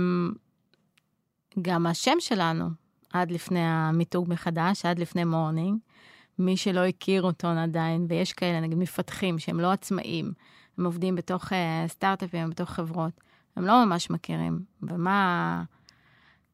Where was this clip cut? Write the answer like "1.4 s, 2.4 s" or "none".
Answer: none